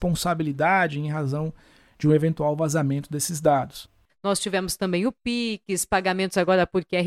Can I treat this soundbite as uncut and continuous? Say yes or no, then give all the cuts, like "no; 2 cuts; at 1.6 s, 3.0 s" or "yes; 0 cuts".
no; 1 cut; at 4.1 s